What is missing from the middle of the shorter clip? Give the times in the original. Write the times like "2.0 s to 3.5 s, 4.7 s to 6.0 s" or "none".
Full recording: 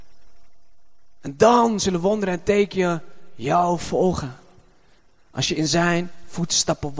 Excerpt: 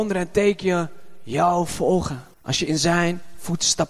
4.5 s to 5.2 s